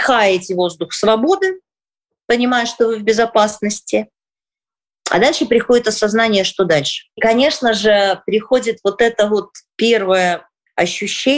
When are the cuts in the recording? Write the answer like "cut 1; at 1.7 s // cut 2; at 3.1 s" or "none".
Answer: none

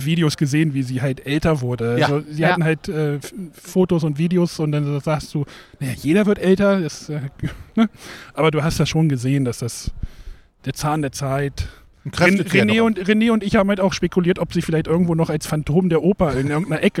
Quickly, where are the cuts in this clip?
none

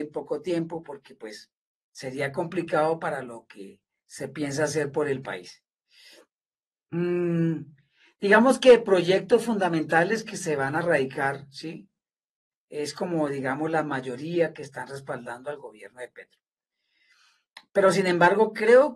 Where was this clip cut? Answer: cut 1; at 12.5 s

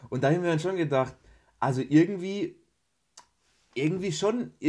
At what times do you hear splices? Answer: none

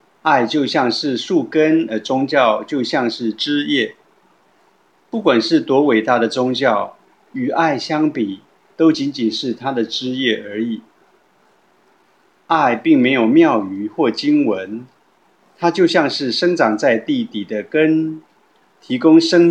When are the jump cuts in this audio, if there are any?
none

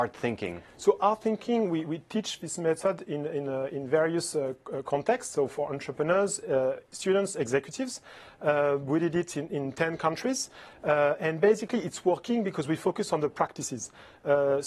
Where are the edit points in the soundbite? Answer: none

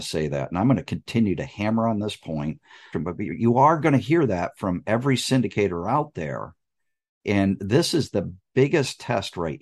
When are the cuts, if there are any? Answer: cut 1; at 2.9 s

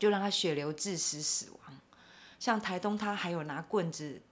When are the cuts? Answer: cut 1; at 2.4 s

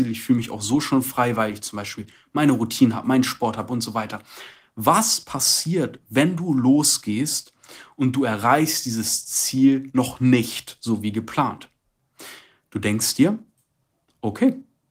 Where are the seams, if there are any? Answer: none

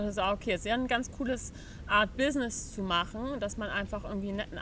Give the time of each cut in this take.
none

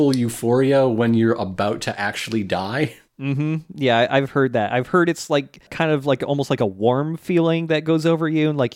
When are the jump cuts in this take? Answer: none

